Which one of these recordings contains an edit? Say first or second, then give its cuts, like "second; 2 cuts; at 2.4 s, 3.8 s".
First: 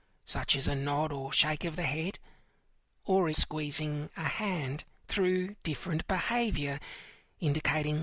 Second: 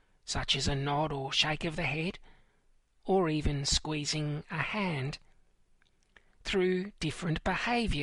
first; 2 cuts; at 3.3 s, 4.9 s